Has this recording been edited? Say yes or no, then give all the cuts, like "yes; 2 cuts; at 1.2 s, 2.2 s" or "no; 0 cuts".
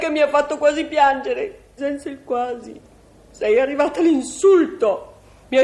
yes; 1 cut; at 1.8 s